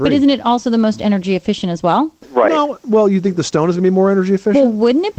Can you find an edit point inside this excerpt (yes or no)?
no